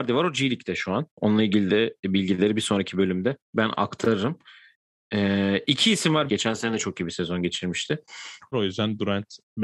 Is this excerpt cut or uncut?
cut